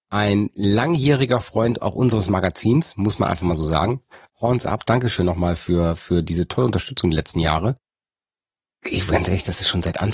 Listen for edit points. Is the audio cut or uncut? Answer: uncut